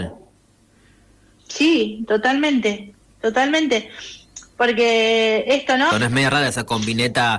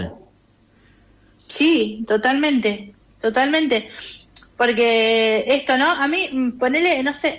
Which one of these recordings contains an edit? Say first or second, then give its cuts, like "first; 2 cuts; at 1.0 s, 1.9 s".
first; 1 cut; at 5.9 s